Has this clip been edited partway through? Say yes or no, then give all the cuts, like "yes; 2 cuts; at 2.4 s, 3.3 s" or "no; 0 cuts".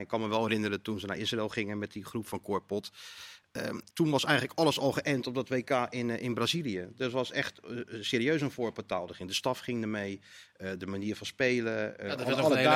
yes; 1 cut; at 3.9 s